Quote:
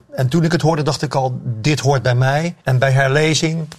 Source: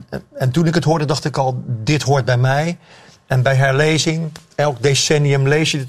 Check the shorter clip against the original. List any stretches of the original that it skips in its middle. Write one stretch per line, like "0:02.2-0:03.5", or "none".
0:02.8-0:03.2